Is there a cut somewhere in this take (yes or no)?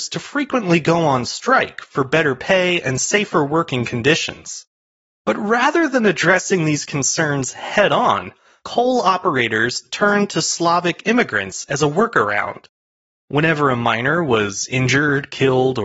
no